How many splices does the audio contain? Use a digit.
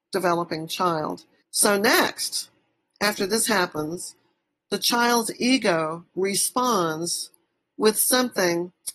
1